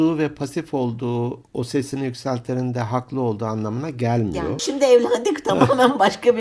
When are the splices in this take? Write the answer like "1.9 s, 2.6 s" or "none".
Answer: 1.4 s, 4.6 s